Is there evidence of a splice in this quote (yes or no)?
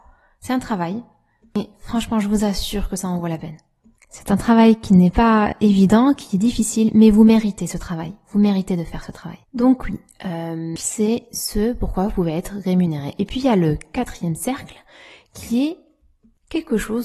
yes